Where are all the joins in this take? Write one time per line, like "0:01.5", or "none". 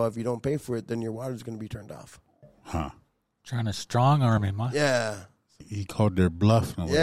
0:05.6